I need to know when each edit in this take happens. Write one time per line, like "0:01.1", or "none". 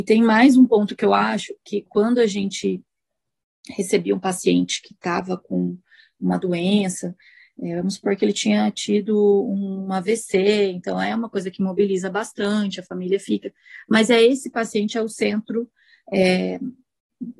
0:01.9